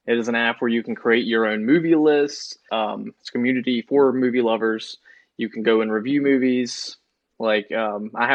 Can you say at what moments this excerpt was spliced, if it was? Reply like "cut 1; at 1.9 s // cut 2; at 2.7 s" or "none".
cut 1; at 2.7 s